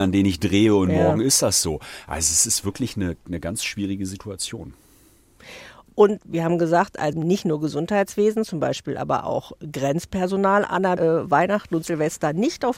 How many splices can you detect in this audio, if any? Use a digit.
2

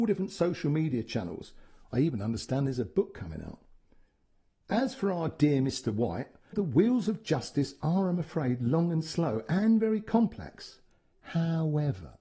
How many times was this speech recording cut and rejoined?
1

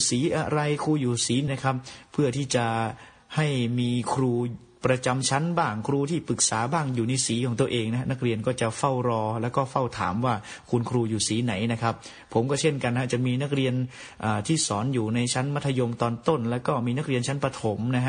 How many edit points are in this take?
1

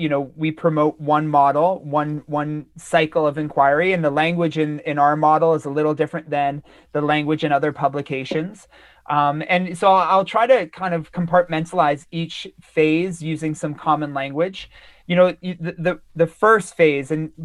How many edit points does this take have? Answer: 0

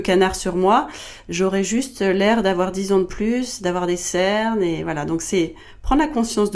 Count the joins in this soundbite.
0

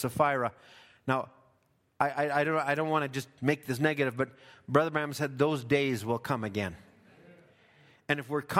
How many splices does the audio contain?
0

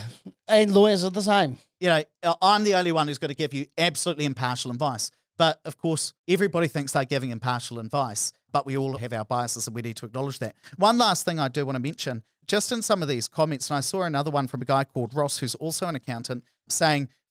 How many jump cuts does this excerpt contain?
2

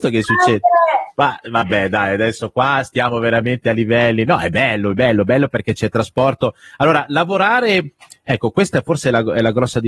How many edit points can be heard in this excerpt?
0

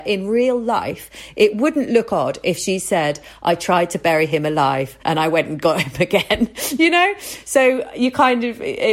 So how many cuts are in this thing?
1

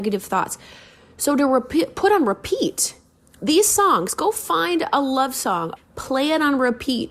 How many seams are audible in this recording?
1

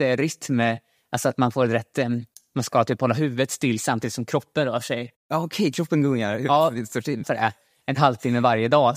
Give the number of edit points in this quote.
1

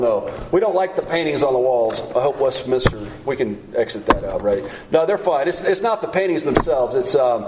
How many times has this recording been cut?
0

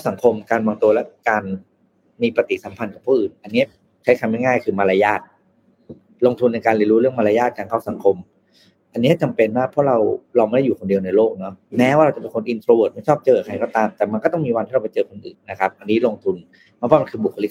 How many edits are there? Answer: 1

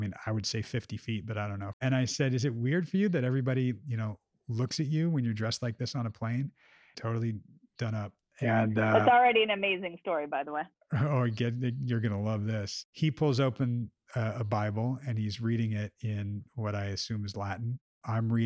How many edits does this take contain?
2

